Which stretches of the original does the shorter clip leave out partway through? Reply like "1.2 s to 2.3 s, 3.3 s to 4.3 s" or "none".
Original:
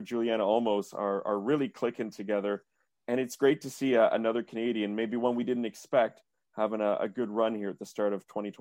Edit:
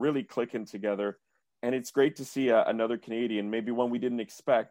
none